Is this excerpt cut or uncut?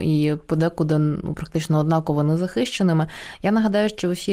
uncut